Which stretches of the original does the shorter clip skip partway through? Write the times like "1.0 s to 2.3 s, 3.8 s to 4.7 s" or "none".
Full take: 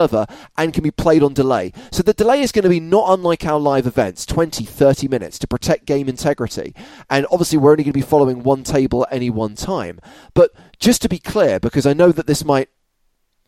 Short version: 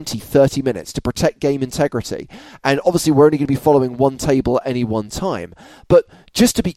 none